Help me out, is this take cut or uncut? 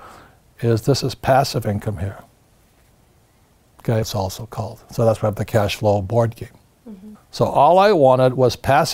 cut